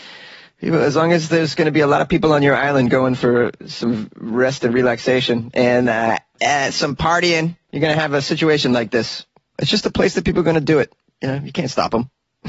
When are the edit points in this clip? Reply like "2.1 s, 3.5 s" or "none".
7.6 s, 9.5 s